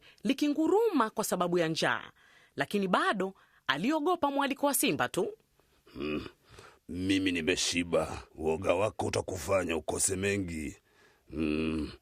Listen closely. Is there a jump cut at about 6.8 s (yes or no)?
yes